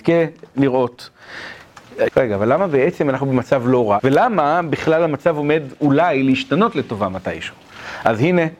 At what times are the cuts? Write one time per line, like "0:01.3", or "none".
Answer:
0:02.1
0:04.0